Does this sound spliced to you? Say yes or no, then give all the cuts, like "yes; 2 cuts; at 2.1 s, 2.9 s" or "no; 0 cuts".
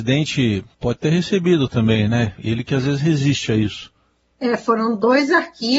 no; 0 cuts